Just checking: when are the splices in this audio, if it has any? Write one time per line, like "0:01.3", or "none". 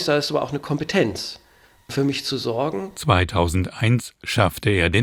none